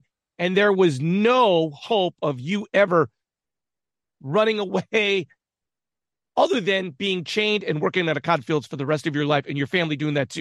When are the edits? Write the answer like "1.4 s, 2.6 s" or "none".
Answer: none